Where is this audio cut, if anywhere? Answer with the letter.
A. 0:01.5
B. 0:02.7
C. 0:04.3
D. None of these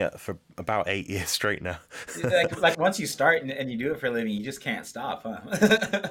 B